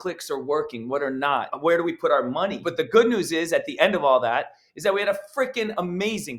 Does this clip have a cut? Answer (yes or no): no